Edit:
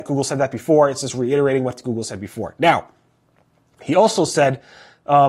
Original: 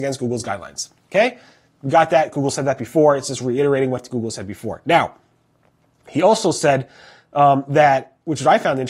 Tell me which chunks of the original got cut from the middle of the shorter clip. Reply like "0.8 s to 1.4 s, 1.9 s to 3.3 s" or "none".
none

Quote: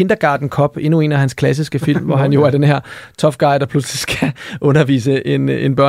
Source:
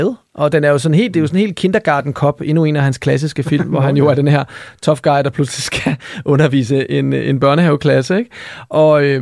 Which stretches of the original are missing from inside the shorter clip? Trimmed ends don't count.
none

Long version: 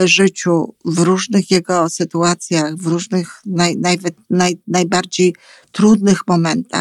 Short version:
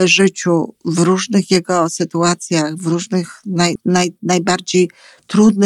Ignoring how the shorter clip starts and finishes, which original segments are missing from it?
3.8 s to 4.2 s

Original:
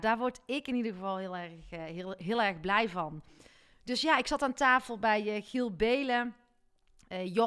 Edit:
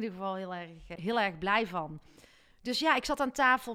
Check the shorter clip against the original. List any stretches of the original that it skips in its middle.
1.8 s to 2.2 s

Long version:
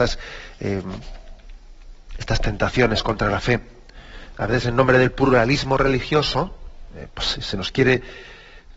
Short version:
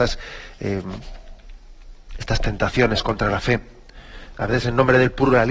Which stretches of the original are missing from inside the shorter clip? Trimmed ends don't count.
none

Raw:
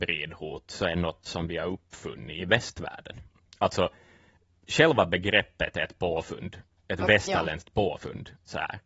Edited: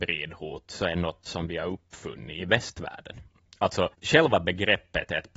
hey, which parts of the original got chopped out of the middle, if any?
3.9 s to 4.6 s

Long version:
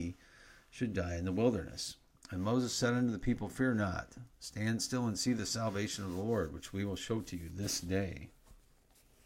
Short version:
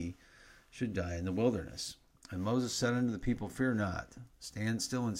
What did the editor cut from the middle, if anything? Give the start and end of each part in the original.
none

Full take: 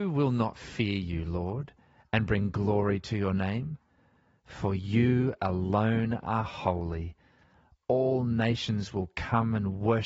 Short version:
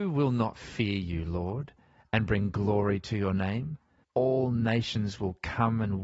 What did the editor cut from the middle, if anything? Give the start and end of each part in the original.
4.0 s to 7.8 s

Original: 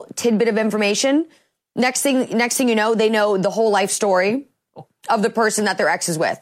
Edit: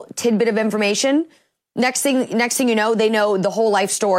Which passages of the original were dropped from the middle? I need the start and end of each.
none

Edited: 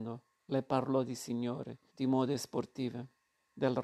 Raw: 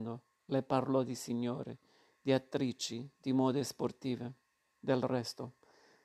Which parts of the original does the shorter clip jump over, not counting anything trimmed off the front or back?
1.9 s to 3.2 s

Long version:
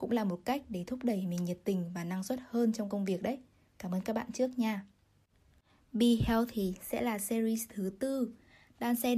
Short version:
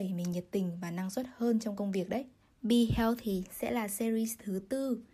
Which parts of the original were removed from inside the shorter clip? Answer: 3.5 s to 5.7 s

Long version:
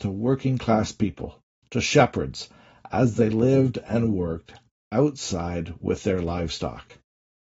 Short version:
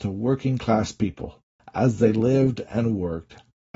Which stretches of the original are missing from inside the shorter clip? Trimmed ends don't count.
1.6 s to 2.8 s

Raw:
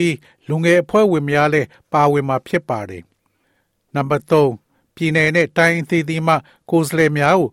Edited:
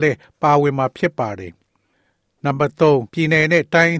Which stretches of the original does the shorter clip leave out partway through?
4.6 s to 4.9 s

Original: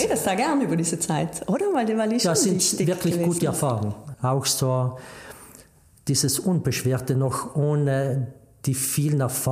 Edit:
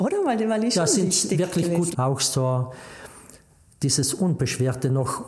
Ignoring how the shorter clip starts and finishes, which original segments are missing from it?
3.4 s to 4.2 s

